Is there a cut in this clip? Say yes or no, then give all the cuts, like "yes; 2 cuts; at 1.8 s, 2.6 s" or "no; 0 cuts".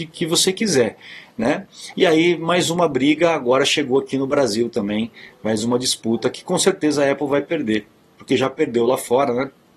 yes; 1 cut; at 1.9 s